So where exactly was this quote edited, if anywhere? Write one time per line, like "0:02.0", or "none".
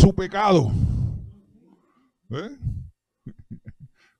0:03.2